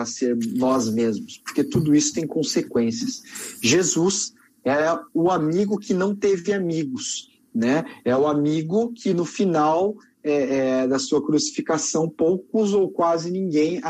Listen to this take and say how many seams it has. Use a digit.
0